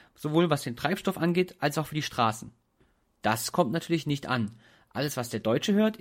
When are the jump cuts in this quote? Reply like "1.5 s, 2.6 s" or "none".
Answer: none